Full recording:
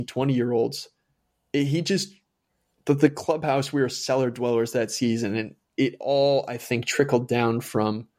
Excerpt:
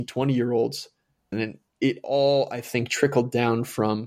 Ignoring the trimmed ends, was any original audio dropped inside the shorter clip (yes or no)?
yes